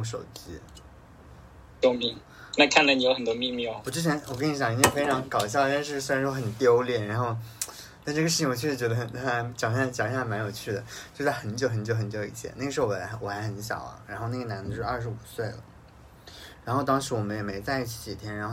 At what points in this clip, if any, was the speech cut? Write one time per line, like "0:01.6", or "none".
none